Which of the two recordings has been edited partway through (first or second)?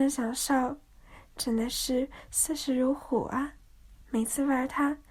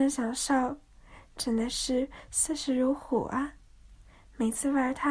first